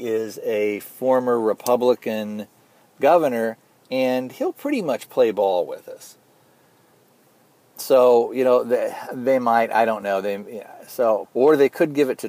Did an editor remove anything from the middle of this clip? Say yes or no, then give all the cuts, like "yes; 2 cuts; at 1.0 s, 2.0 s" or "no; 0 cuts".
yes; 1 cut; at 11.2 s